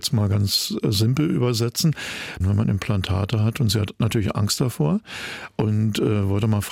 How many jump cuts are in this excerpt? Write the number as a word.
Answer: one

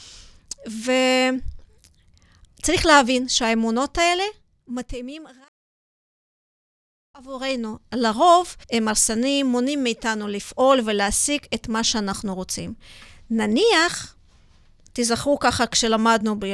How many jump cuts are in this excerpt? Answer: one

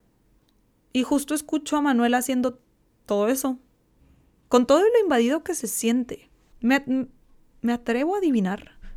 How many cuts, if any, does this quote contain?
one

